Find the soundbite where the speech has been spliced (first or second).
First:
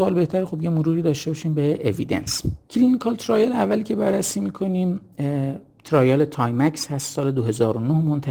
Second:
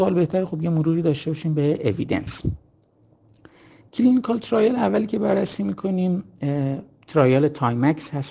first